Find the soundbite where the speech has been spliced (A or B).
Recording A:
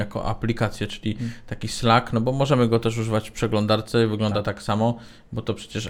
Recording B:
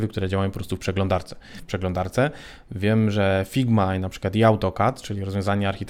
B